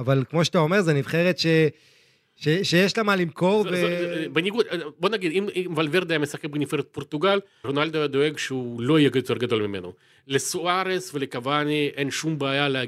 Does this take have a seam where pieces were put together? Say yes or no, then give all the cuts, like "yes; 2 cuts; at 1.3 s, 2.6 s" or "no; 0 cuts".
yes; 1 cut; at 7.6 s